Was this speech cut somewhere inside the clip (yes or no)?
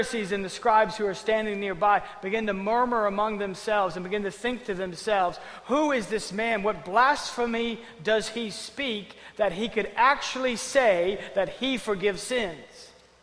no